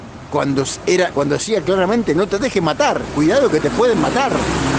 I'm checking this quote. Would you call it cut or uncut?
cut